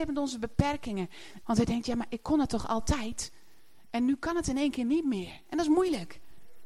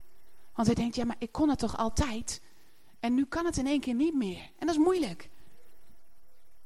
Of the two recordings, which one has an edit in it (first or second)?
first